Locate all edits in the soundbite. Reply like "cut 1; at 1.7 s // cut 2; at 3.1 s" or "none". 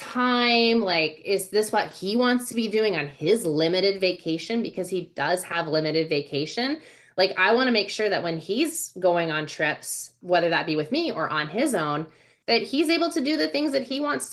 none